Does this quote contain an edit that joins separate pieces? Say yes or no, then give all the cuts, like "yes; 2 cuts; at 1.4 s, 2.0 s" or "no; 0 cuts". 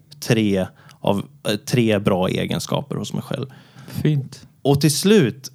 yes; 1 cut; at 3.8 s